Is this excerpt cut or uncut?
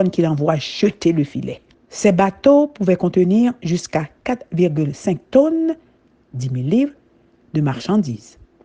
cut